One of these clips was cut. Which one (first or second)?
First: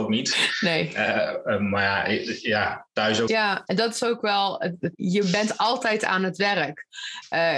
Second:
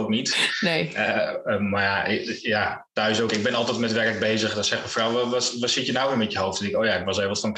first